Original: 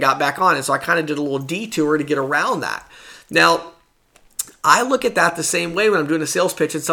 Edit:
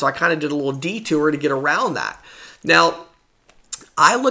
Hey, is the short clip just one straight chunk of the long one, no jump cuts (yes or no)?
yes